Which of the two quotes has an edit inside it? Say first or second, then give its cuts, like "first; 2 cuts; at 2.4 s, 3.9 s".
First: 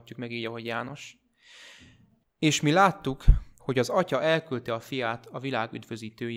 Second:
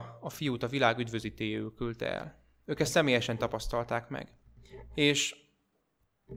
first; 2 cuts; at 2.2 s, 3.6 s